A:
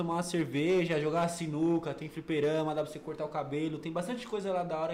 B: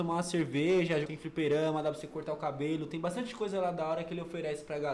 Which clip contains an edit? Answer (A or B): B